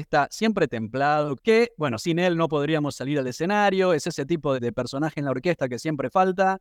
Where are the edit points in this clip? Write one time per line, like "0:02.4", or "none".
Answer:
0:01.4
0:04.5